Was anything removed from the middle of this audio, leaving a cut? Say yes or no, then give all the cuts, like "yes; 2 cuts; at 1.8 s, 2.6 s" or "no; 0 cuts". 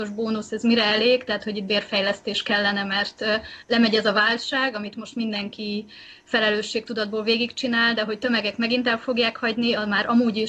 no; 0 cuts